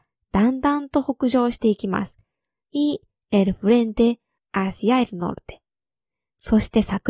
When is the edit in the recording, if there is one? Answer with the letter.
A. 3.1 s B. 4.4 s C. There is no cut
B